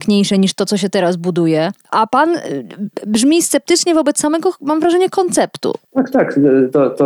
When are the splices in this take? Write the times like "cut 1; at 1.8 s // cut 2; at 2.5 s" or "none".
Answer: cut 1; at 5.8 s

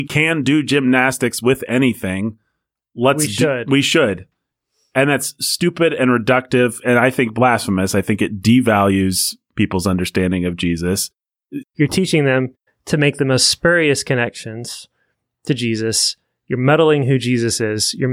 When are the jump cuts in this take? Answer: cut 1; at 11.6 s

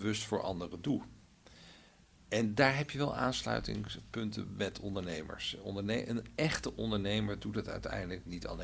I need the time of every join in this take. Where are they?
none

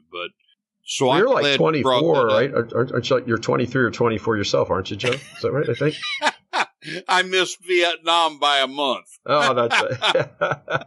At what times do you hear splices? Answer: none

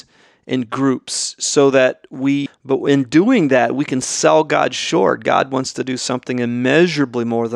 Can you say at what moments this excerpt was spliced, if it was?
cut 1; at 2.5 s

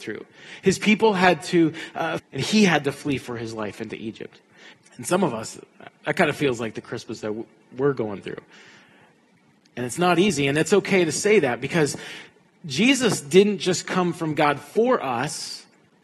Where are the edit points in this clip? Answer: cut 1; at 2.2 s // cut 2; at 4.7 s

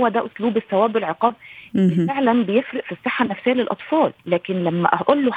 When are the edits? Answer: cut 1; at 4.2 s

